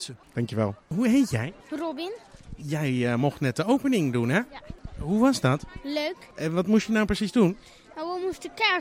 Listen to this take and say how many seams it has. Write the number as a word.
zero